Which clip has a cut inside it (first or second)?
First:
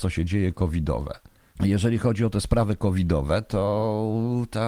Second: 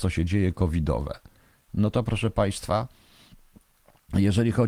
first